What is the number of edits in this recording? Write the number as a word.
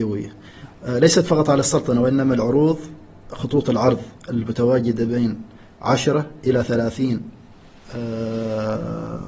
one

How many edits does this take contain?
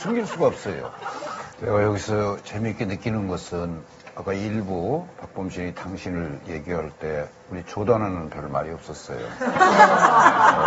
one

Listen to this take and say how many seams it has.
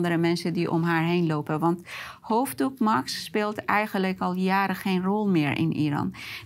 zero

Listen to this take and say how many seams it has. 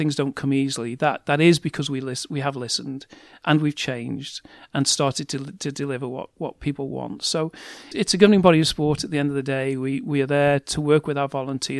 one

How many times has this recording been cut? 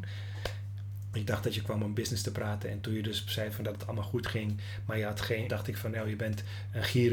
two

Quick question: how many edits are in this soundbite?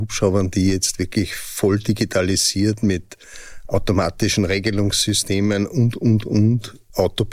zero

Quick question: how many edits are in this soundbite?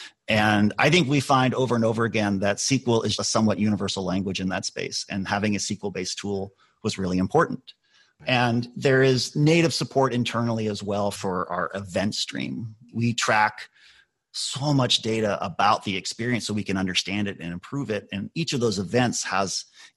one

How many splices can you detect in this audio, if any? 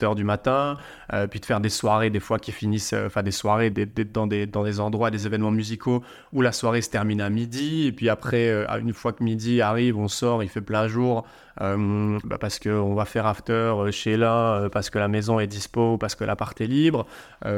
two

